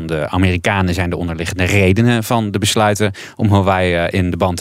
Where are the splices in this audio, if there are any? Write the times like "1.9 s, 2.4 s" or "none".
none